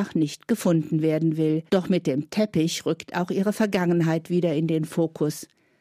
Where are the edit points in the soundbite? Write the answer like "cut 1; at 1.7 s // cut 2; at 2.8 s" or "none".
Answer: cut 1; at 1.7 s